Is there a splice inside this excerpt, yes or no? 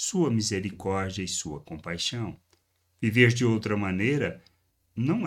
no